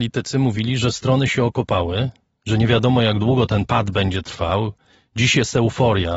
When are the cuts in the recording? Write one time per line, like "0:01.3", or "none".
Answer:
none